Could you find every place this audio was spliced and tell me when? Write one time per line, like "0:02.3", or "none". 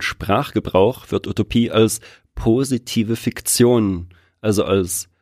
none